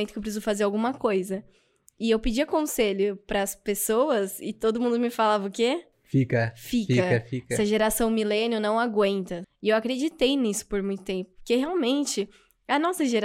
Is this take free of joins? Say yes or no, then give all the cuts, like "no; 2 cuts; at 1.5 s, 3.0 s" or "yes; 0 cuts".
no; 1 cut; at 9.4 s